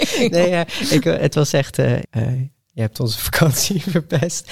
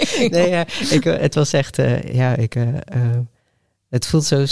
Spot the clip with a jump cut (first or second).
first